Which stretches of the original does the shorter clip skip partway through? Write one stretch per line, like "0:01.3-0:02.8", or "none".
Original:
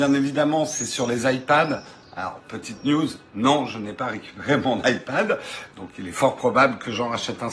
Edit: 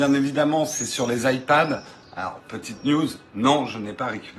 none